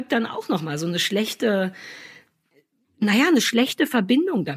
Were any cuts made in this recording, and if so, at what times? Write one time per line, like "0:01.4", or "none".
none